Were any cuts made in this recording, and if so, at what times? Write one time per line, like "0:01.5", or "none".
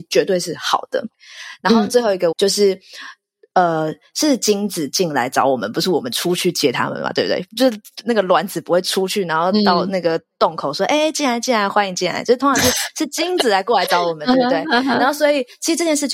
0:02.3